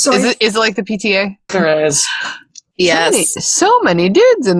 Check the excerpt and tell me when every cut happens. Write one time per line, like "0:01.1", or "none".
0:01.5

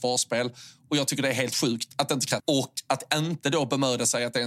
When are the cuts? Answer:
0:02.4

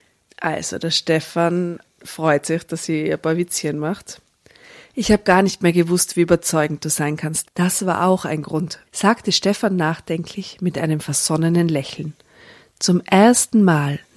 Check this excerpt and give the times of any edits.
0:07.4
0:08.9

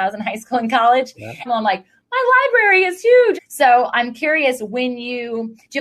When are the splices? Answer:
0:01.5
0:03.4

